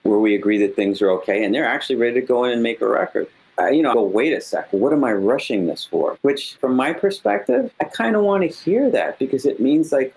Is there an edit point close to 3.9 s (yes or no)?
yes